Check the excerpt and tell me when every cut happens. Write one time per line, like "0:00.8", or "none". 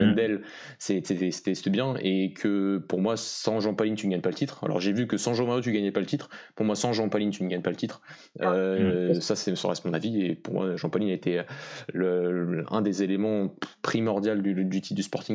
none